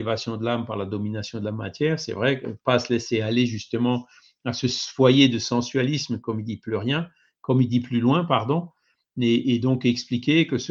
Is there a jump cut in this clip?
no; 0 cuts

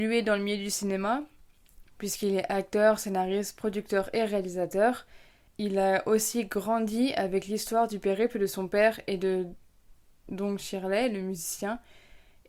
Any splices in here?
no; 0 cuts

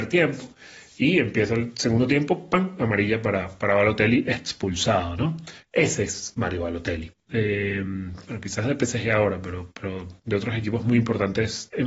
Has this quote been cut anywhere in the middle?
yes; 1 cut; at 7.3 s

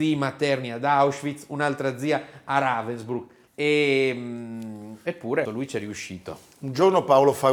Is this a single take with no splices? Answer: no; 2 cuts; at 3.5 s, 5.5 s

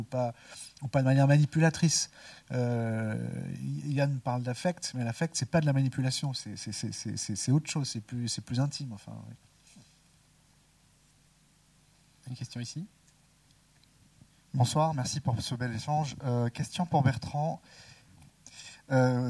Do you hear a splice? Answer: no; 0 cuts

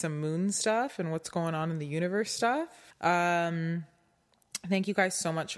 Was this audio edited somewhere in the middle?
yes; 1 cut; at 2.9 s

